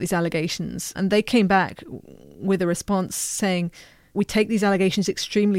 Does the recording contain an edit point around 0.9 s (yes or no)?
yes